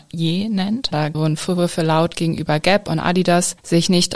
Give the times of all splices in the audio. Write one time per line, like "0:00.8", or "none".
0:00.9